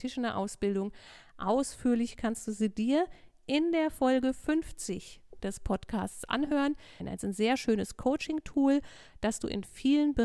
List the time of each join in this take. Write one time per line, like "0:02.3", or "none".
0:07.0